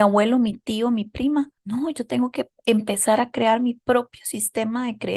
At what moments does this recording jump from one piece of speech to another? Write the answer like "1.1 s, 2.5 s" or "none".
1.6 s